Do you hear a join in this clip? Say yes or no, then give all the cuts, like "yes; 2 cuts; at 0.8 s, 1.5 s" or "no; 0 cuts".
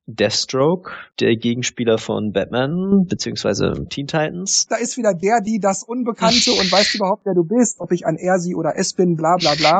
yes; 2 cuts; at 4.7 s, 7.8 s